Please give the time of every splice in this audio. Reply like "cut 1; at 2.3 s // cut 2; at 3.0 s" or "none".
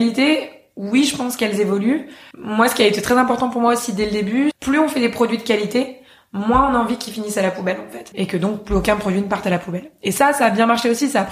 cut 1; at 2.3 s // cut 2; at 4.5 s // cut 3; at 8.1 s